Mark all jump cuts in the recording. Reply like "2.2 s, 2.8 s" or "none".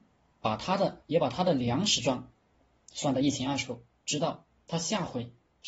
none